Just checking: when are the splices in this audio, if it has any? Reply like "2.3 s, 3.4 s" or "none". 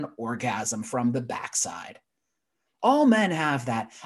none